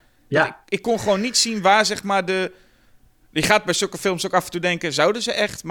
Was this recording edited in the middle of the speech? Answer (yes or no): no